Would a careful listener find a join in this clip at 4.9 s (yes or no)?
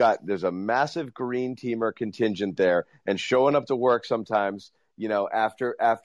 no